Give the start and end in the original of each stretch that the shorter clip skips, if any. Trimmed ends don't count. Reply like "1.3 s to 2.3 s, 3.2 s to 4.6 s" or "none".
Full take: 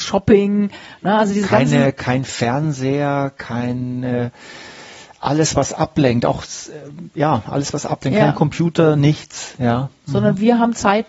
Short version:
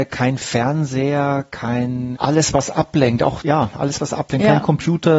4.0 s to 5.2 s, 6.4 s to 7.1 s